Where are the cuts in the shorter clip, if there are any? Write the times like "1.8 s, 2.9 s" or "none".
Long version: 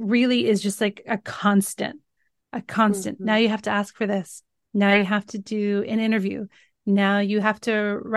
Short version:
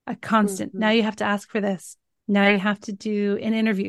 none